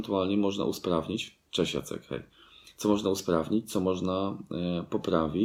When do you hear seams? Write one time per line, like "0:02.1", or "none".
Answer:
none